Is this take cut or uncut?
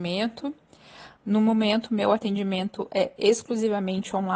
cut